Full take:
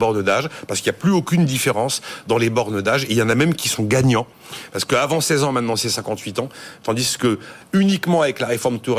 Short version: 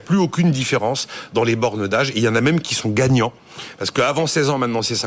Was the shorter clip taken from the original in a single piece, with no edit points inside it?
yes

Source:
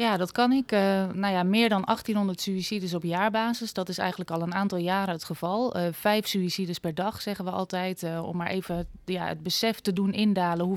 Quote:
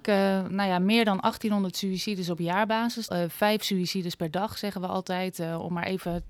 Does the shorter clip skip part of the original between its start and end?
yes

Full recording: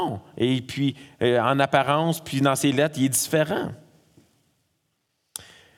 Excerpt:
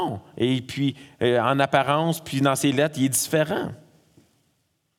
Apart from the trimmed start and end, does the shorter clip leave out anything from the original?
no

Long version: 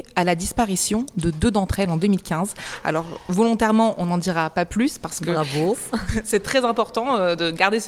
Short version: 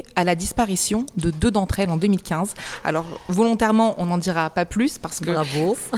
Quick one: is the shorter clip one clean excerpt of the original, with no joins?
yes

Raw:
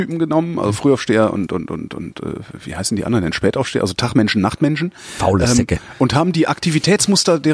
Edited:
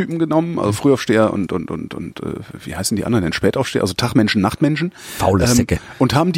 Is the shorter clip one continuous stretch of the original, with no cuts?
yes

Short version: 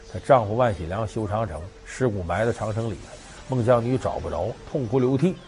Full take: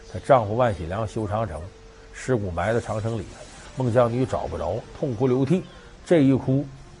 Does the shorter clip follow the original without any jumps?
no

